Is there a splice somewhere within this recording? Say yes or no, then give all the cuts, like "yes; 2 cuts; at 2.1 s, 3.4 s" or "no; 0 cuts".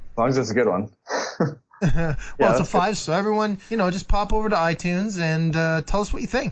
yes; 1 cut; at 3.0 s